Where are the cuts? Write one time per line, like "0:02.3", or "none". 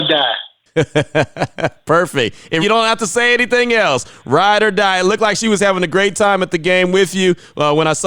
0:02.6